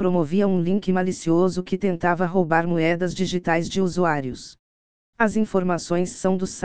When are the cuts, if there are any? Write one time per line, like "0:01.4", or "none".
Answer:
0:05.0